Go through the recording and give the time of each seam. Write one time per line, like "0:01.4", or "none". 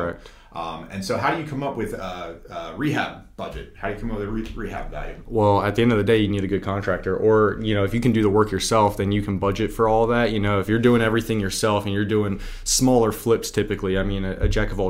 none